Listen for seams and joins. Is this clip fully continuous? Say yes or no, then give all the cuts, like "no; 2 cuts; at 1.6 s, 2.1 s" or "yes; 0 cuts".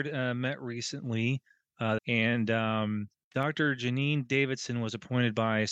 no; 1 cut; at 2.0 s